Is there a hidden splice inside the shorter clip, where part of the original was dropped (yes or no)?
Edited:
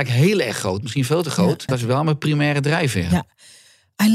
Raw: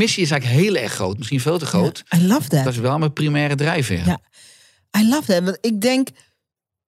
yes